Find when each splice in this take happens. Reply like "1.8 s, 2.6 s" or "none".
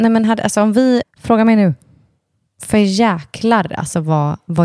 1.0 s